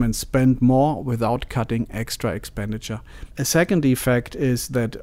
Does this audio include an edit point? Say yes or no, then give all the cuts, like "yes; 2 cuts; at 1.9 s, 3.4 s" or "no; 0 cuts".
no; 0 cuts